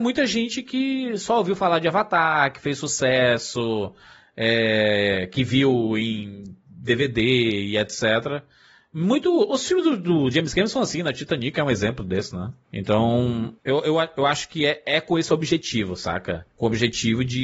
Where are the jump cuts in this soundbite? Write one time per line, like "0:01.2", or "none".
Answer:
none